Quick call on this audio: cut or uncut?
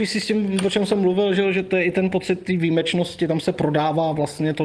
uncut